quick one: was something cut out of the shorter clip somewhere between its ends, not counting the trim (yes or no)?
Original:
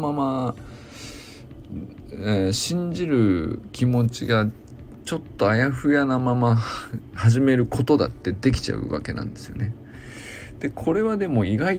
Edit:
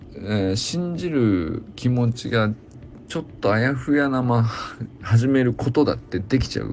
yes